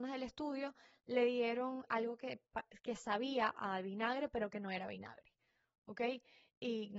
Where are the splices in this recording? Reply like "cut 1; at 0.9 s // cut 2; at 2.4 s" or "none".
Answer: cut 1; at 1.9 s